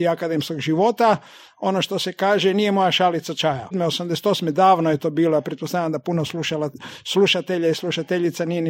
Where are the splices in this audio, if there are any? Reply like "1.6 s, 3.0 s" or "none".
3.7 s